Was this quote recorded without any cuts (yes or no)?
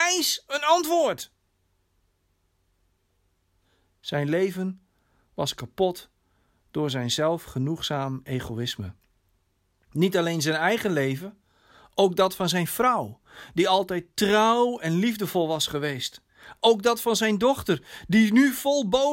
yes